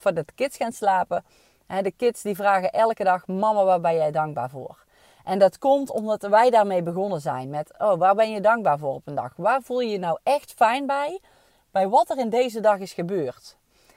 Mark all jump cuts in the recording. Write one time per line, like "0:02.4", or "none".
none